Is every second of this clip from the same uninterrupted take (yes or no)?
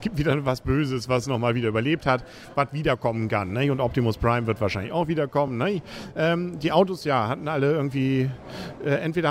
yes